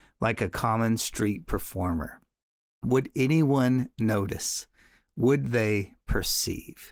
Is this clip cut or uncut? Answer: uncut